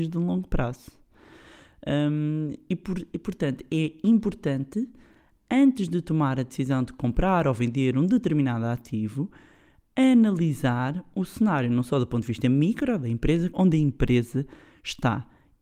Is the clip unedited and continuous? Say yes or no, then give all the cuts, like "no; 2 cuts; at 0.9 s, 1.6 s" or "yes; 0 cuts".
no; 1 cut; at 13.5 s